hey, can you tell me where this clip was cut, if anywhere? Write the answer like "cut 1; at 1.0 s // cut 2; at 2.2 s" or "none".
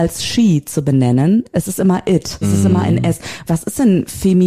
cut 1; at 2.4 s // cut 2; at 3.5 s